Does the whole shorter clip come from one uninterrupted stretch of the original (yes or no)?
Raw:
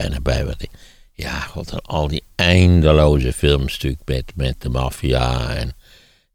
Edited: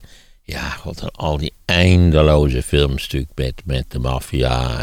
yes